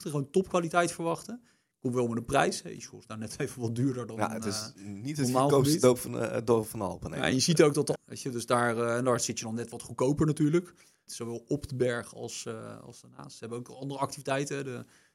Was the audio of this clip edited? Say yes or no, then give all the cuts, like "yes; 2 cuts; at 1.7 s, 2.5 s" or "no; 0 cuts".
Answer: yes; 2 cuts; at 8.0 s, 11.1 s